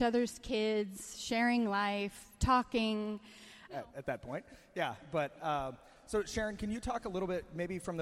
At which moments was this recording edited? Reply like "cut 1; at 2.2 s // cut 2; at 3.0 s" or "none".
cut 1; at 3.7 s